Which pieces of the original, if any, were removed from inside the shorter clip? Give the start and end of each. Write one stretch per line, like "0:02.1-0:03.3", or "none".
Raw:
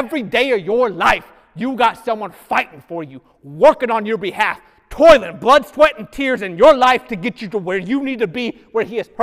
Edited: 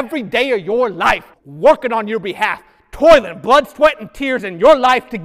0:01.3-0:03.3